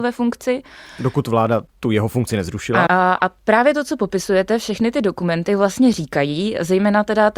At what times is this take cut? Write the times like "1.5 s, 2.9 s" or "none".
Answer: 2.9 s